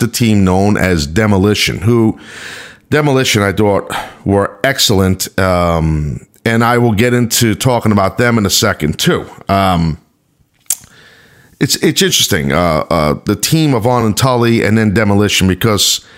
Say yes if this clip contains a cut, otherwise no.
no